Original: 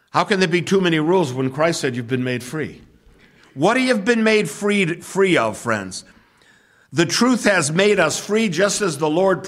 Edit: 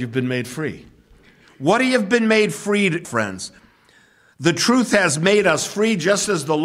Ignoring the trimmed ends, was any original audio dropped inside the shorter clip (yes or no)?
yes